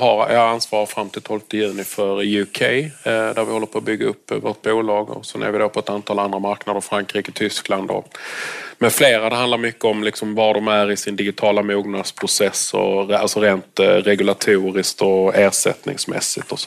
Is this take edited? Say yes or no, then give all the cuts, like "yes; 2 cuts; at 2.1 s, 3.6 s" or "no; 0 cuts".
no; 0 cuts